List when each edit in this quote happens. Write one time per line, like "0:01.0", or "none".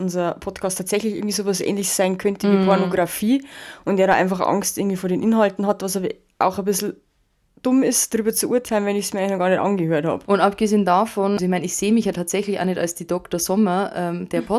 0:10.3
0:11.4